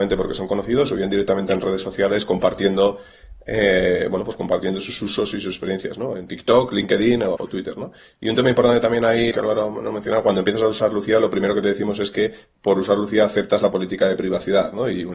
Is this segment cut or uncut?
cut